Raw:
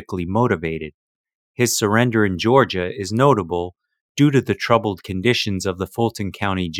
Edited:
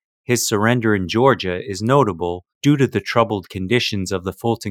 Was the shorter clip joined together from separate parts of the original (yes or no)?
yes